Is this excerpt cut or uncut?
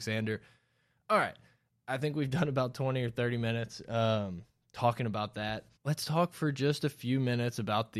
cut